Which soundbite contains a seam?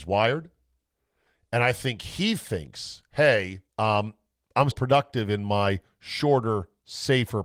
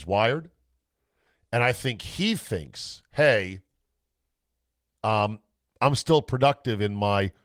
first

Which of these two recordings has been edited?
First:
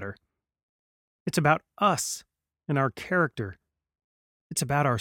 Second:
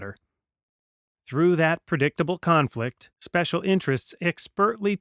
second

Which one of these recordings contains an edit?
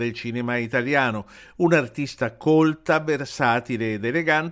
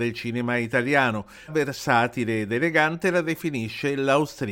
second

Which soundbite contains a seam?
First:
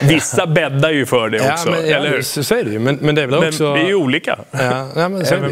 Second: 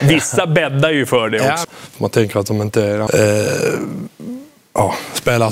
second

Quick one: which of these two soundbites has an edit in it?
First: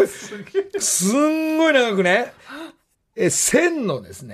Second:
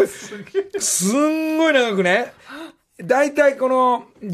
first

